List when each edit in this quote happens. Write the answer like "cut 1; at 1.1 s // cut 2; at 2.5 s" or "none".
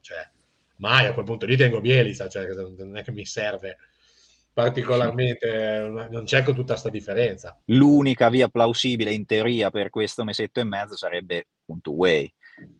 cut 1; at 7.6 s